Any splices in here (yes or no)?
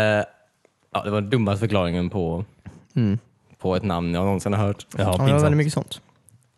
no